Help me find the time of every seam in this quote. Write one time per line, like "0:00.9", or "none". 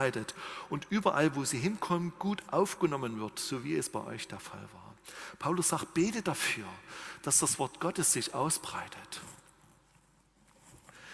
none